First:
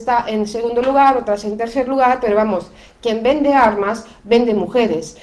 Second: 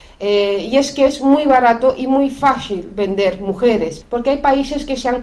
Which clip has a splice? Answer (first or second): second